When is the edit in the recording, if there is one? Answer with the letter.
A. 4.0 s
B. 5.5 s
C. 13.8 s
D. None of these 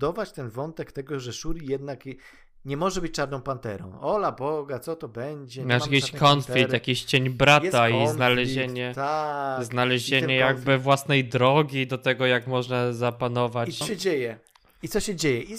C